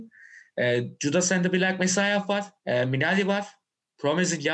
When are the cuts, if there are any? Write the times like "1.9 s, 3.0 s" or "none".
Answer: 2.6 s